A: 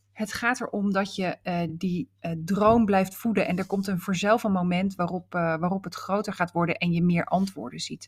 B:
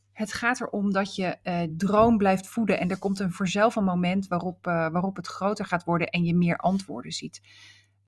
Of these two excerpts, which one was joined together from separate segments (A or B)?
B